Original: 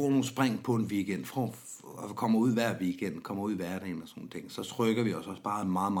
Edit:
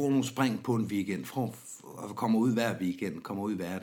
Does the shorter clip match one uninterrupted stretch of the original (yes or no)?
yes